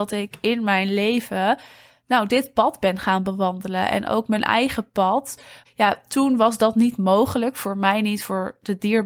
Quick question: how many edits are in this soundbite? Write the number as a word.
one